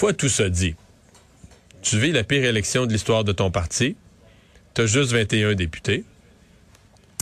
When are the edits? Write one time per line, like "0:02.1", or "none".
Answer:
none